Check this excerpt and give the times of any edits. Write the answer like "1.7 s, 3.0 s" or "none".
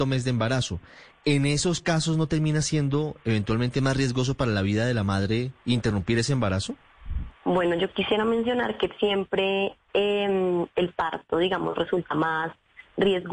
none